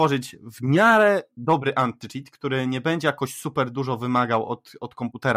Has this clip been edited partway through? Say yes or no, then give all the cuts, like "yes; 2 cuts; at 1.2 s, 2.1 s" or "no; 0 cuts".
no; 0 cuts